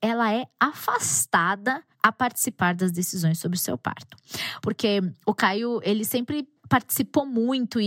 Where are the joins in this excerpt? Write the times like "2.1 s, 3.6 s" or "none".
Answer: 4.6 s, 6.6 s